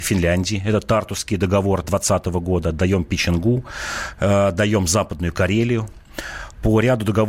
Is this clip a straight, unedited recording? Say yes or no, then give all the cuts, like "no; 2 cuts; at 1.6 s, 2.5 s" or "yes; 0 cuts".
yes; 0 cuts